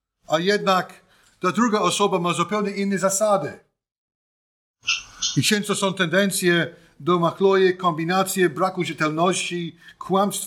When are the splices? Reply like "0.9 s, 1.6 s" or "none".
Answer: none

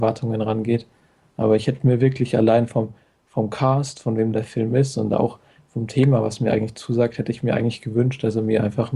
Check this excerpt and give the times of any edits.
none

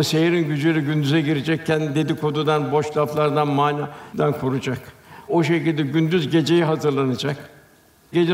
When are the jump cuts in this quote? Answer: none

